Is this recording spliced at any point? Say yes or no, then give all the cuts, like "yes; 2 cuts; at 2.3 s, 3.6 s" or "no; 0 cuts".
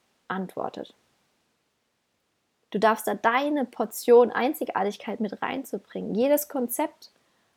yes; 1 cut; at 2.6 s